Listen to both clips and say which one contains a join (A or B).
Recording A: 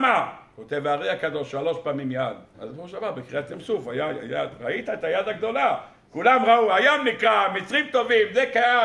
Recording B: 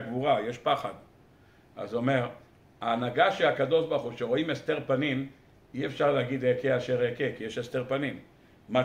A